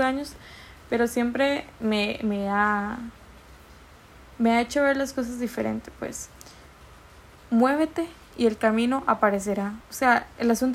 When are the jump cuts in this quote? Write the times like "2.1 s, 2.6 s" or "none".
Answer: none